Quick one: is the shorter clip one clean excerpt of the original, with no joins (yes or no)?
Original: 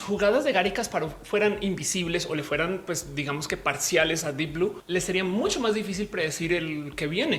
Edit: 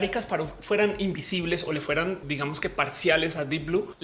no